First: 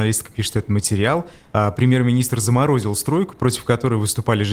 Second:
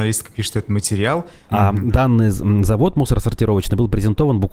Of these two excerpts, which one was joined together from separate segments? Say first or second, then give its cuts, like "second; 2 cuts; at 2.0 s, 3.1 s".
second; 1 cut; at 1.5 s